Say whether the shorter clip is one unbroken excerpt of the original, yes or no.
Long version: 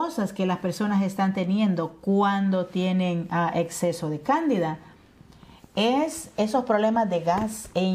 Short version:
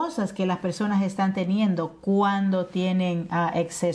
yes